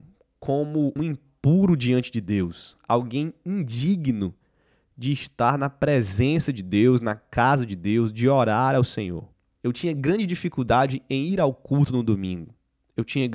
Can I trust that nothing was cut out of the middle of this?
no; 2 cuts; at 1.0 s, 9.6 s

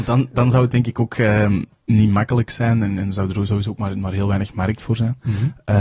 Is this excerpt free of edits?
yes; 0 cuts

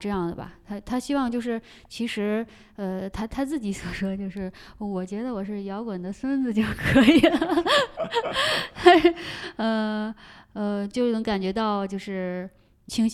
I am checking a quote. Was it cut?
no; 0 cuts

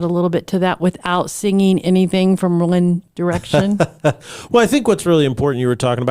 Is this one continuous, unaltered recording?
yes; 0 cuts

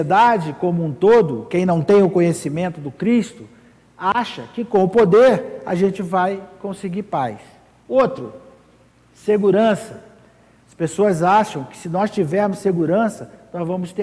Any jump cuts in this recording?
no; 0 cuts

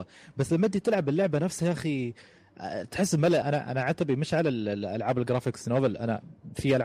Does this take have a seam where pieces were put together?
yes; 1 cut; at 3.4 s

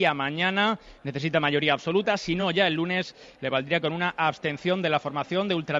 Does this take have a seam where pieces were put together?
no; 0 cuts

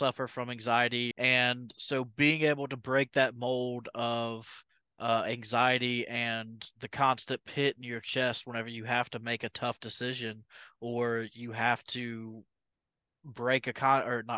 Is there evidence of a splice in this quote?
yes; 1 cut; at 1.1 s

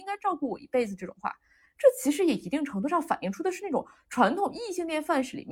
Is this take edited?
no; 0 cuts

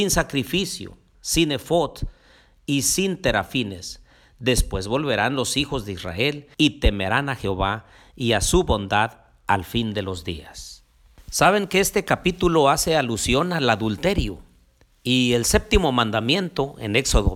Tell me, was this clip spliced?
yes; 2 cuts; at 1.1 s, 6.5 s

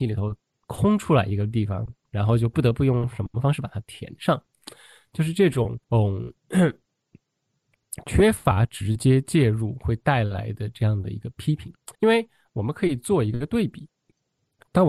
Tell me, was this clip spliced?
yes; 2 cuts; at 5.8 s, 11.9 s

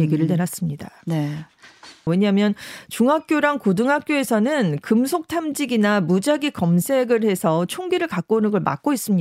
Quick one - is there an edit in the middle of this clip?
yes; 1 cut; at 2.1 s

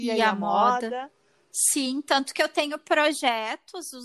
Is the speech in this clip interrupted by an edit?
no; 0 cuts

